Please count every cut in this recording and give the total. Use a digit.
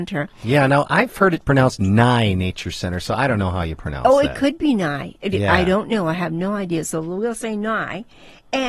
0